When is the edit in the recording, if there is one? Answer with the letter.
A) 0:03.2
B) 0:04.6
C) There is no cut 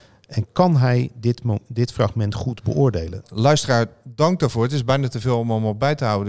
A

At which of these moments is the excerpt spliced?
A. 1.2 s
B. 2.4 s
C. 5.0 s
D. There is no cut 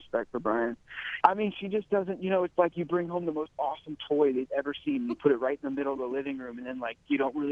A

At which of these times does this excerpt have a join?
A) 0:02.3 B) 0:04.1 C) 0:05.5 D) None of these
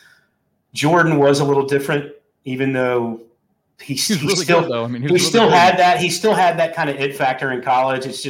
D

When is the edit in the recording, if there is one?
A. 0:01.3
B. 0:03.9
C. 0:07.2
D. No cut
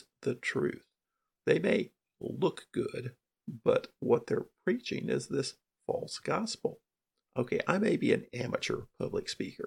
C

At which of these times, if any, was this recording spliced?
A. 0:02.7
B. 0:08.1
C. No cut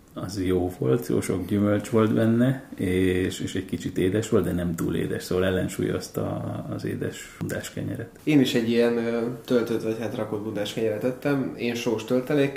C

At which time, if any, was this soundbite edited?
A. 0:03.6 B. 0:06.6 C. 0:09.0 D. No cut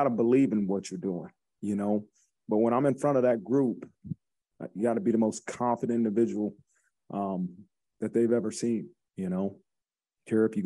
C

